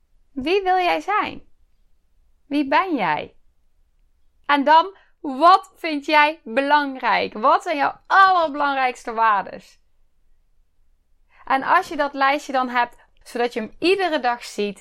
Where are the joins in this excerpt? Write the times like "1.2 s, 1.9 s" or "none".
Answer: 13.2 s